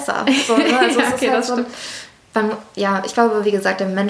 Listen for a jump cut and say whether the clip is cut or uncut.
uncut